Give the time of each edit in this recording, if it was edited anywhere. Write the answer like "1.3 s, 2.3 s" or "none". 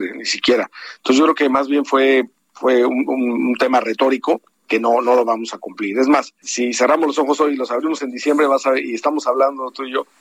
6.4 s